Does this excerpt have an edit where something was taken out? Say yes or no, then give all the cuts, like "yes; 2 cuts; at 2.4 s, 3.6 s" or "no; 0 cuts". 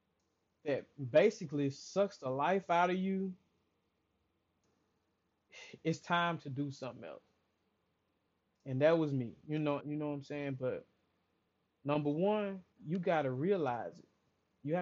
yes; 2 cuts; at 9.8 s, 12.7 s